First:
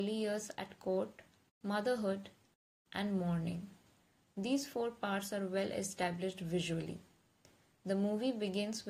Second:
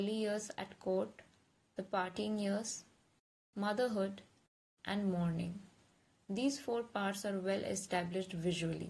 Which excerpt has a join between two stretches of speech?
first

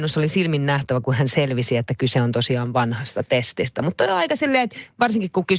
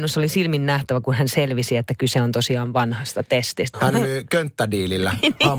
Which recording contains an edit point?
second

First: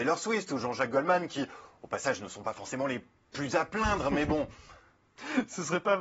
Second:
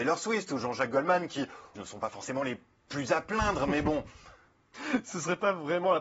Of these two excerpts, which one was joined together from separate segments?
second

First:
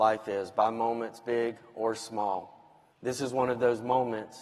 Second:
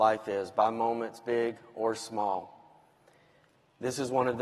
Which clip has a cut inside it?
first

